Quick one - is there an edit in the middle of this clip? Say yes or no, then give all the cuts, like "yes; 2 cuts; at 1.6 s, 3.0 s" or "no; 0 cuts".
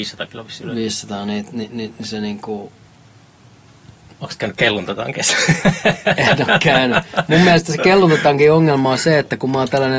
yes; 1 cut; at 4.1 s